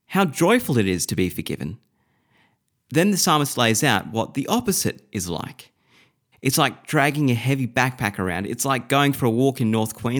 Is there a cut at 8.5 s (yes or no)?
no